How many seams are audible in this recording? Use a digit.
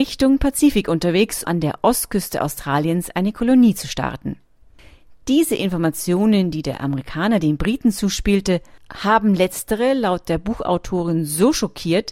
1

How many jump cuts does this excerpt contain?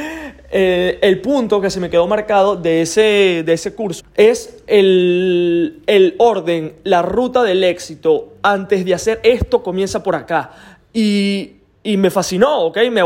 1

